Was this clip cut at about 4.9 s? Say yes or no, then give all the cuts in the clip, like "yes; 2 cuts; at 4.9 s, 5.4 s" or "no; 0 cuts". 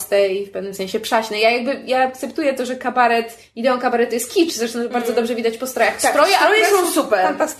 no; 0 cuts